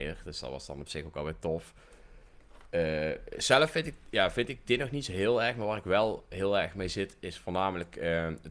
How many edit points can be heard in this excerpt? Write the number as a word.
zero